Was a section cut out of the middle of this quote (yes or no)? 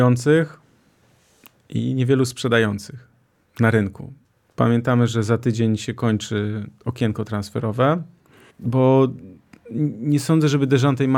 yes